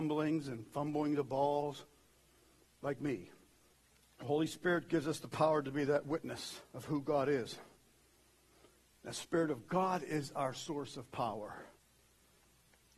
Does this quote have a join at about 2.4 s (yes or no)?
no